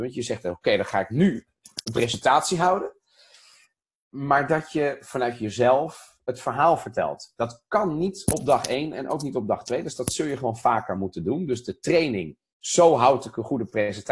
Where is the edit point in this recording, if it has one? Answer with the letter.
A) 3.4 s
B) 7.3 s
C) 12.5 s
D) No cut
D